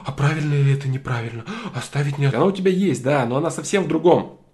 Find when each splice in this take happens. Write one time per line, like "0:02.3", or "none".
0:02.3